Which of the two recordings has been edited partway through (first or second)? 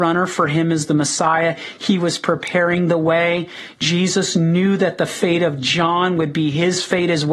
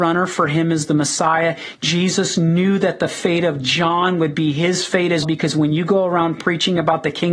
second